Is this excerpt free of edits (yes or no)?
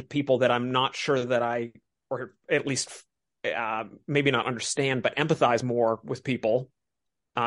yes